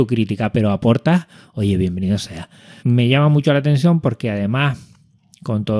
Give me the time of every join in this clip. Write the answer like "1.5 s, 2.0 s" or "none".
2.8 s